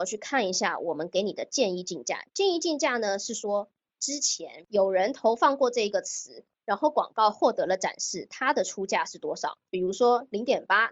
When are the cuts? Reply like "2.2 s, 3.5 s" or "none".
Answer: 9.7 s